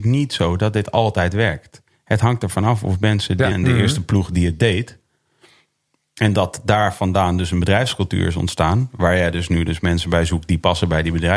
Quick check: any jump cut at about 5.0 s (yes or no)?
no